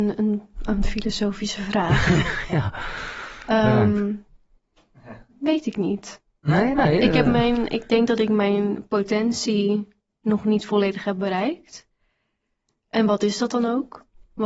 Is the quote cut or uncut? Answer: uncut